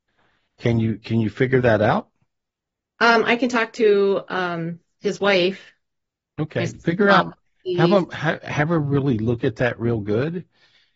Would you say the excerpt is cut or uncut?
uncut